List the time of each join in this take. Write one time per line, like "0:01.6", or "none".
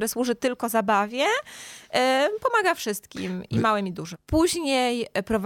0:04.1